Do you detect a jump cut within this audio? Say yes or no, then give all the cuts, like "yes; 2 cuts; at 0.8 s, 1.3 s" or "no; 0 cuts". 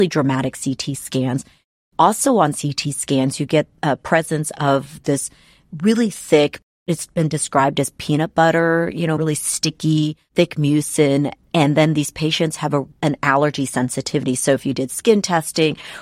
yes; 1 cut; at 9.2 s